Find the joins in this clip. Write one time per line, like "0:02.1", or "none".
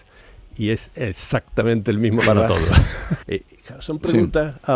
0:03.2